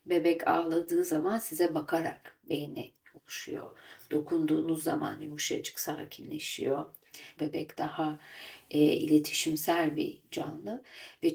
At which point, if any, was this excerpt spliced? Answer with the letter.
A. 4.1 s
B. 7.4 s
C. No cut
B